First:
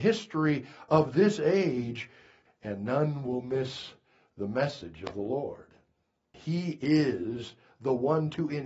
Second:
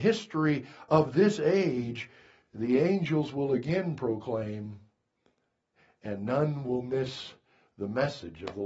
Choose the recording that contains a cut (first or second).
first